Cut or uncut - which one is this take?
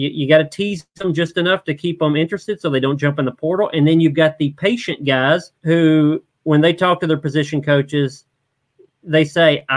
cut